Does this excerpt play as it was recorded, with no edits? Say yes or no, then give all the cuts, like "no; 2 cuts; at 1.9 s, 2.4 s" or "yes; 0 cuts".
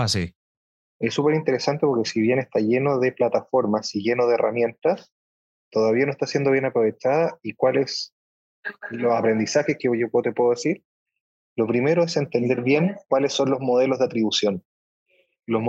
yes; 0 cuts